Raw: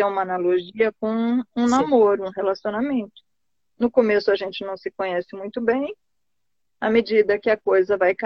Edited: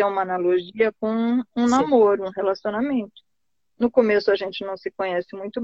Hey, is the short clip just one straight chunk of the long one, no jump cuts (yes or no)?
yes